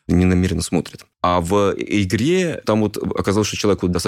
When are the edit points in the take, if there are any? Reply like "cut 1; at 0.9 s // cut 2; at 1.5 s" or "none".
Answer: cut 1; at 1.1 s // cut 2; at 2.6 s